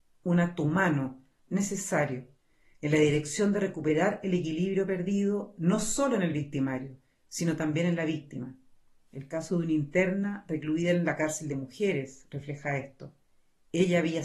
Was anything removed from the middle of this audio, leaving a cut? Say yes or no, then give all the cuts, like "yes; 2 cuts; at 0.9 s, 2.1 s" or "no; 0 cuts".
yes; 1 cut; at 1.5 s